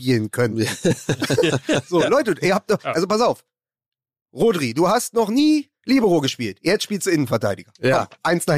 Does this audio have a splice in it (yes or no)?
yes